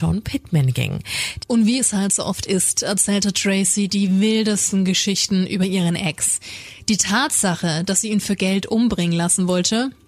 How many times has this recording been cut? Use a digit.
1